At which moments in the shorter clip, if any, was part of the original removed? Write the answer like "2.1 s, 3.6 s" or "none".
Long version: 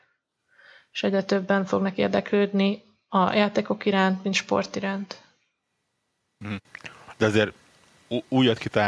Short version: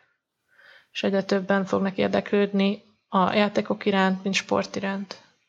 none

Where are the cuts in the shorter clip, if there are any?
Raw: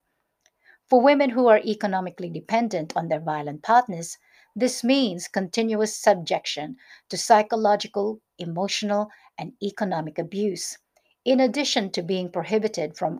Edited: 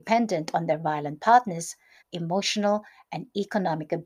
2.0 s

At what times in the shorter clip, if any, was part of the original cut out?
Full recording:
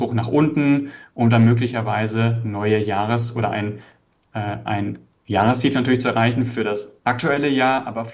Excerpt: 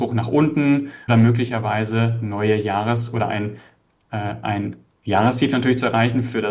1.1 s

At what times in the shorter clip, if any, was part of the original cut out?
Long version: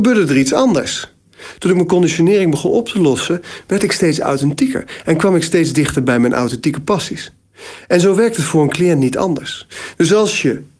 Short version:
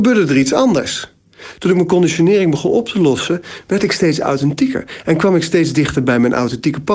none

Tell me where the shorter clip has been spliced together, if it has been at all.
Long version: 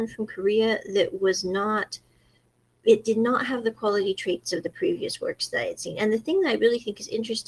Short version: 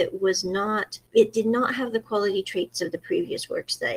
1.1 s

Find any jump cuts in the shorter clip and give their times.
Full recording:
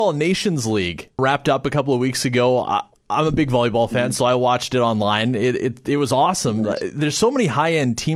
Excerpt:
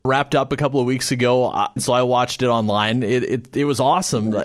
1.8 s

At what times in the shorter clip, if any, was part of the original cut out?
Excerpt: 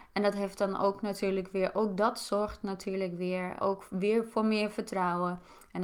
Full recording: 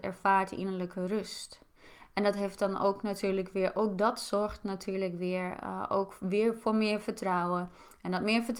3.6 s

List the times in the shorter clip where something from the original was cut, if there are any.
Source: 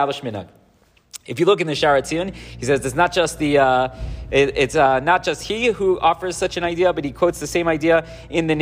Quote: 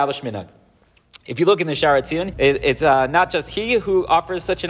2.3 s

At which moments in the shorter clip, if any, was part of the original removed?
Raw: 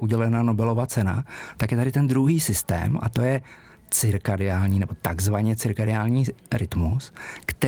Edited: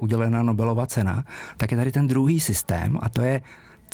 none

